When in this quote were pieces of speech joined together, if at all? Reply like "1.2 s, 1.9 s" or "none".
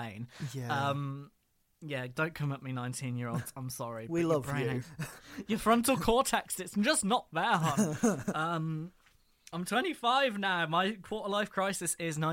4.8 s